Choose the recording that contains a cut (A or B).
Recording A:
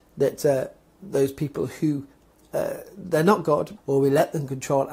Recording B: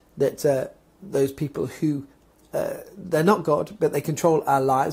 A